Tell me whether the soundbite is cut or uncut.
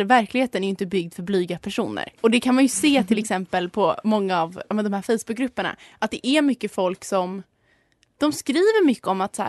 cut